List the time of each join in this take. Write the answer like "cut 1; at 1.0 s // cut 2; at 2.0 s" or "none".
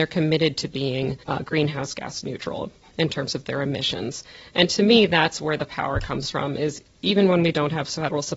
cut 1; at 1.2 s